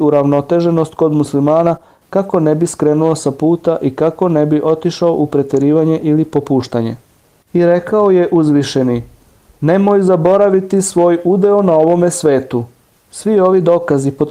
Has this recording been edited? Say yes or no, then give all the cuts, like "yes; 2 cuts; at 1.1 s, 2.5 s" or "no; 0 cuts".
yes; 2 cuts; at 7.4 s, 12.9 s